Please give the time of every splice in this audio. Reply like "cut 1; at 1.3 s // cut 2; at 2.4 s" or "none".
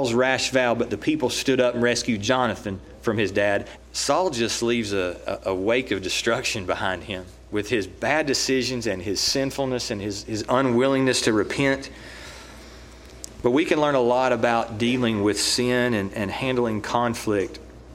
cut 1; at 3.8 s